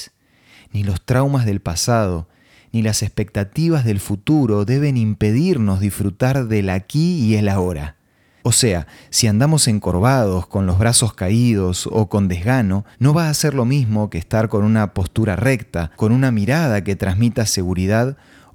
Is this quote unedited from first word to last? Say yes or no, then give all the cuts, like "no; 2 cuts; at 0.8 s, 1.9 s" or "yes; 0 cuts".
no; 3 cuts; at 8.4 s, 12.9 s, 15.9 s